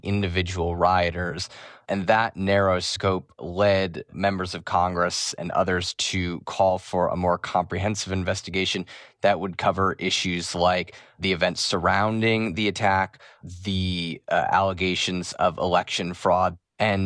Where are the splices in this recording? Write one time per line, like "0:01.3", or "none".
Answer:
none